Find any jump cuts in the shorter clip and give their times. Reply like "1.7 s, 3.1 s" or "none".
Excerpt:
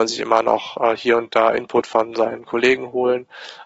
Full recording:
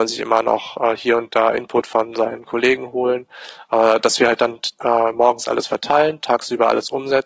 none